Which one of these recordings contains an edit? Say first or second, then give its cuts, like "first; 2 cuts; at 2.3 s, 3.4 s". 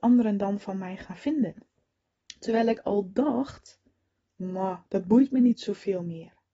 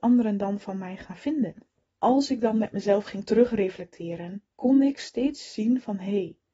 second; 2 cuts; at 1.9 s, 4.5 s